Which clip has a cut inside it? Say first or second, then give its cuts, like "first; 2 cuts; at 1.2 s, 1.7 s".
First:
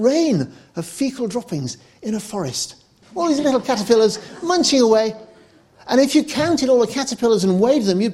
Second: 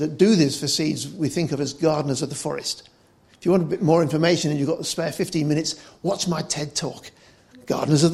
first; 1 cut; at 3.0 s